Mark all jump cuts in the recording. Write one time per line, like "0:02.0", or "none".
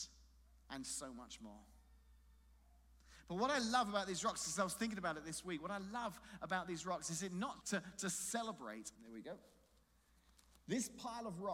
0:07.6
0:09.0